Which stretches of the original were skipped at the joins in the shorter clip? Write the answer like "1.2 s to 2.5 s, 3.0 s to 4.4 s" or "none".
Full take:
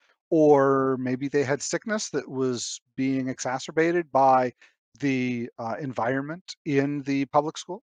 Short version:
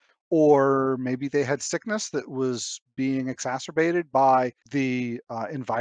4.6 s to 4.9 s